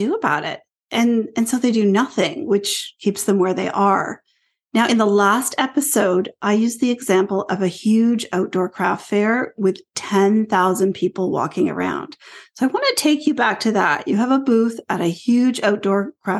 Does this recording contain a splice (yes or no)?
no